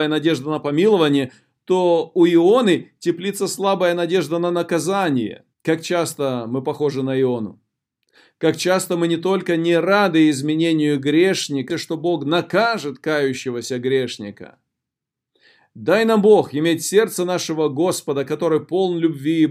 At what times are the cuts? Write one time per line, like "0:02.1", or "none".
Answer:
0:05.5
0:11.7